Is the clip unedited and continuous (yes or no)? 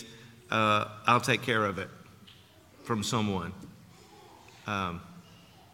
yes